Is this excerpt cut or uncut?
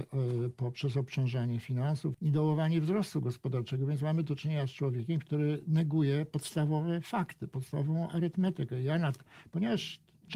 cut